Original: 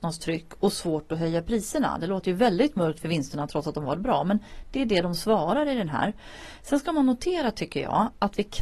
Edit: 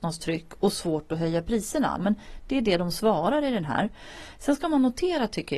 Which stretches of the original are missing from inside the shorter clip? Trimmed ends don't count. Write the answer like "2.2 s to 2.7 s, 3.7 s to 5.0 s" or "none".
2.0 s to 4.2 s